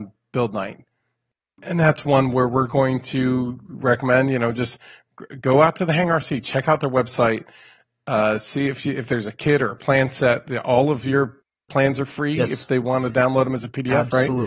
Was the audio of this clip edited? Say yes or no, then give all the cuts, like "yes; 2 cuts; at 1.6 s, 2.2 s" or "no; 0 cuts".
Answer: no; 0 cuts